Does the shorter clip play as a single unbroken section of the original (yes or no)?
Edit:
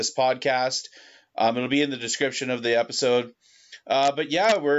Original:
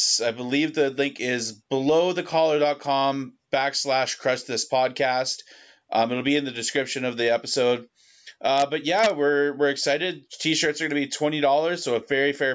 yes